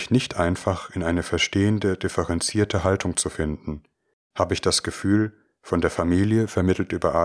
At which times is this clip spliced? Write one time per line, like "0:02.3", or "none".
none